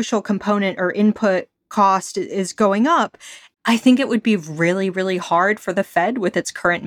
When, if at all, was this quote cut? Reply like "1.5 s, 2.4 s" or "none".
3.5 s